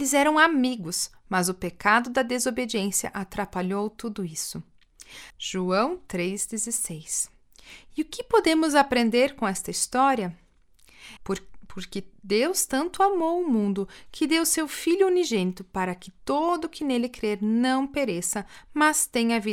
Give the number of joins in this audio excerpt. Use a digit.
2